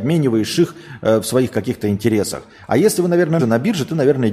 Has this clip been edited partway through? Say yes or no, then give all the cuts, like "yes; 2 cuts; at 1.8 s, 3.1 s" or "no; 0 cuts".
yes; 1 cut; at 3.4 s